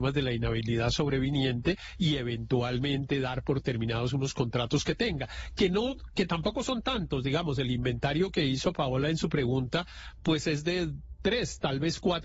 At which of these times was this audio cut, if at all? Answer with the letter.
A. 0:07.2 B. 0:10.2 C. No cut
C